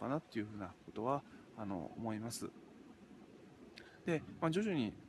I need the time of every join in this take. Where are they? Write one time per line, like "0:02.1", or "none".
0:04.0